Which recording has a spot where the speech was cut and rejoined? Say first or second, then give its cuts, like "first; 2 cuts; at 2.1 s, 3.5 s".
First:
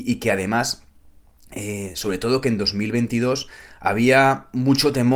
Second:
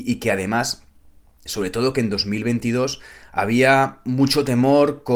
second; 1 cut; at 1.5 s